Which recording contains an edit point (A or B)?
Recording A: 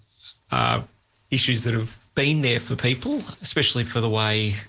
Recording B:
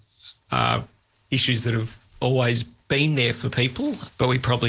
A